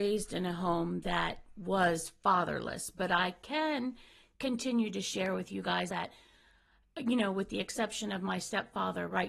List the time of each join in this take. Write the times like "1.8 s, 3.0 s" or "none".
5.9 s

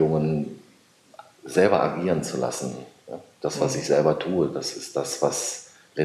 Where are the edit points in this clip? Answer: none

